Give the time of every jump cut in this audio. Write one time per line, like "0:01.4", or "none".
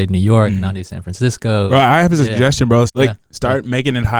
0:02.9